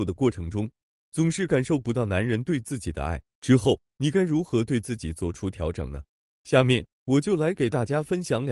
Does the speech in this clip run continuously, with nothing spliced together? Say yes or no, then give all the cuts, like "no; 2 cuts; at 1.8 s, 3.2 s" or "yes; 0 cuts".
yes; 0 cuts